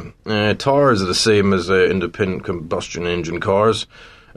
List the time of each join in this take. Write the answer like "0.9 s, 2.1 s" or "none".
none